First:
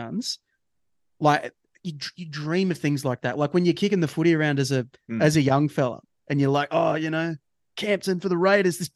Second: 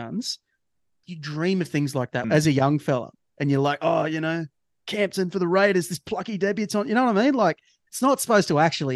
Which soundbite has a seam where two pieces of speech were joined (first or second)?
second